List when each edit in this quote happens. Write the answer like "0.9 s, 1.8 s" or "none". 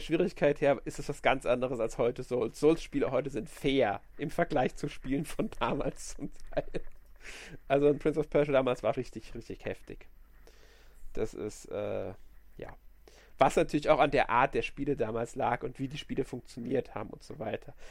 9.0 s